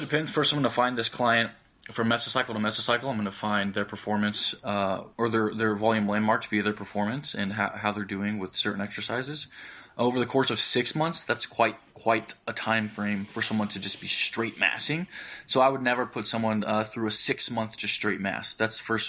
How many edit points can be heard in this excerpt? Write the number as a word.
one